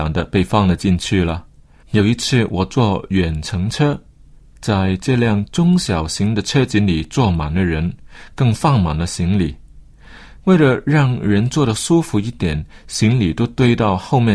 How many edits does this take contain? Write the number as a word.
one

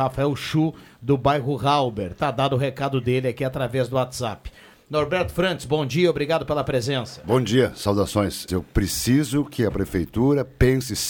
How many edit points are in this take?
one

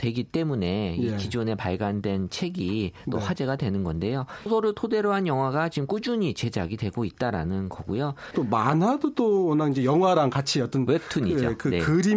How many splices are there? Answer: two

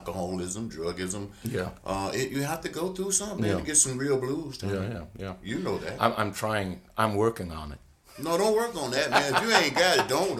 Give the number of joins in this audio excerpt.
zero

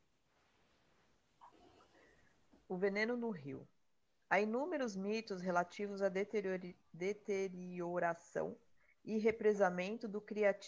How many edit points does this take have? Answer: zero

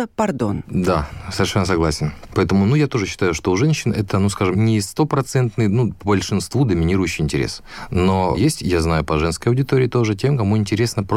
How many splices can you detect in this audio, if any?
zero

